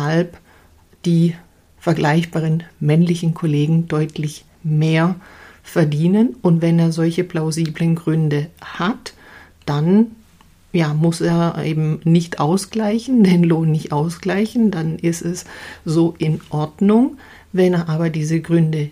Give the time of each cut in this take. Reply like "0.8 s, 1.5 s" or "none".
none